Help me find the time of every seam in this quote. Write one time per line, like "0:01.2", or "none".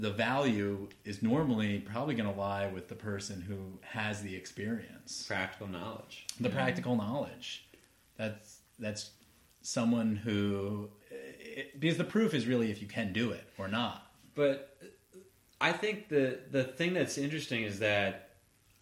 0:11.0